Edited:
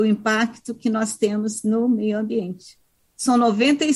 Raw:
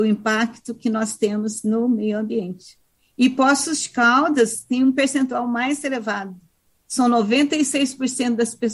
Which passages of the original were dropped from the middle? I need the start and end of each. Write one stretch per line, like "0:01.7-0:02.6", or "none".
0:03.0-0:06.7